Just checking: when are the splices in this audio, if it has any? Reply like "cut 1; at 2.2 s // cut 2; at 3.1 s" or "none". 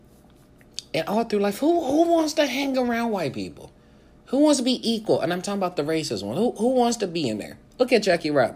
cut 1; at 7.7 s